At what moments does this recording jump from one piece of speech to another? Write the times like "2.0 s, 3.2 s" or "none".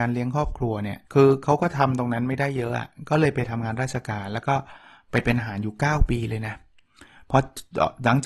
1.0 s